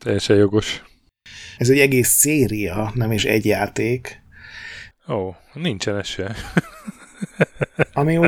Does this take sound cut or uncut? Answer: cut